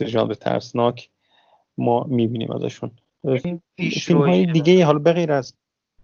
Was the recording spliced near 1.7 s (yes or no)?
no